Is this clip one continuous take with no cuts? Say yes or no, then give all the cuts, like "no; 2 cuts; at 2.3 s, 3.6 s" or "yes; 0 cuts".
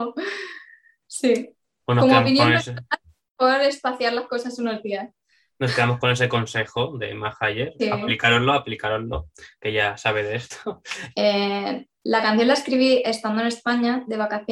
no; 1 cut; at 11.1 s